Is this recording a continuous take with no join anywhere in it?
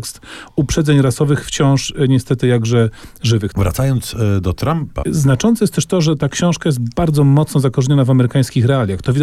no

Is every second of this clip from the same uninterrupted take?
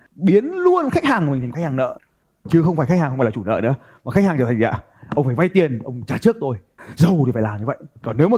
yes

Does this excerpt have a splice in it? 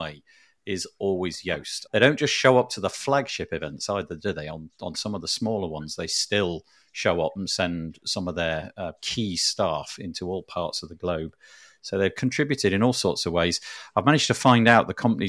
yes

